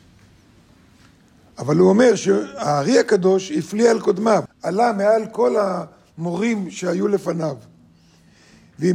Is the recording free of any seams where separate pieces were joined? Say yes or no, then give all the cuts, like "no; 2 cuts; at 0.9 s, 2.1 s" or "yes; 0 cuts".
no; 1 cut; at 4.5 s